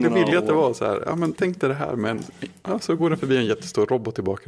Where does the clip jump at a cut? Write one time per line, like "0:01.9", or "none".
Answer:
0:01.4